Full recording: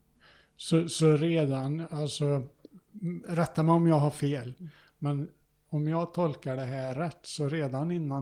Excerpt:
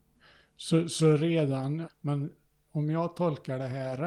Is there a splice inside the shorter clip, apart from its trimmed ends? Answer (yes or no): yes